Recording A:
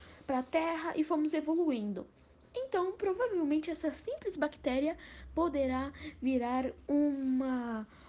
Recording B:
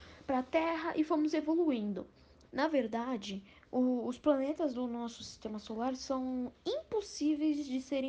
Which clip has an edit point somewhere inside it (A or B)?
B